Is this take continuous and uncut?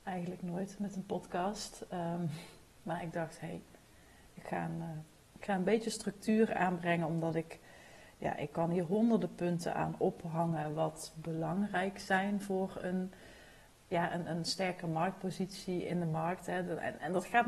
yes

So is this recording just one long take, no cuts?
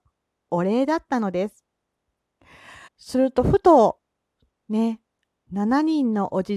no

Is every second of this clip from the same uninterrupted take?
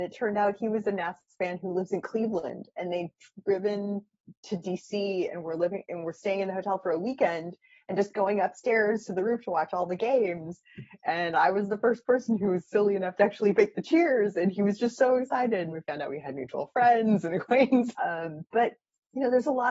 no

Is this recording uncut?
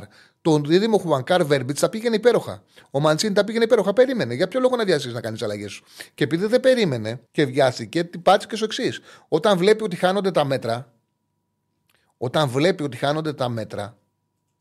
no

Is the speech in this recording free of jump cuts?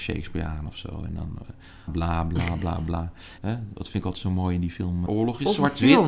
no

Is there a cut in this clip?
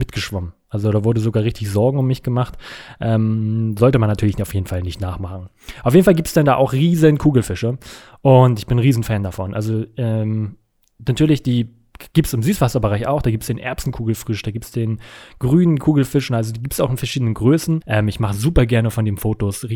yes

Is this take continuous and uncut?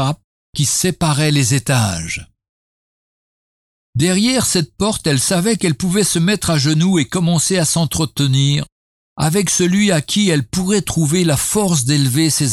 yes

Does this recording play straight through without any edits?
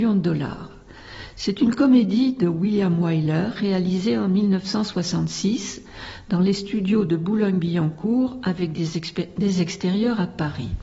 yes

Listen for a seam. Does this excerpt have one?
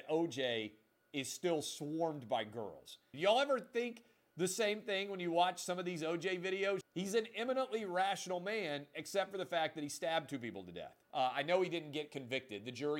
yes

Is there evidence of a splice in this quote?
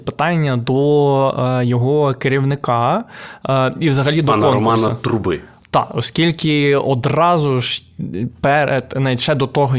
no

